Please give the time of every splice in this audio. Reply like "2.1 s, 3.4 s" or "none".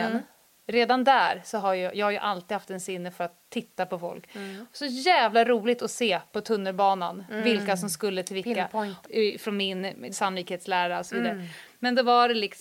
9.0 s, 10.1 s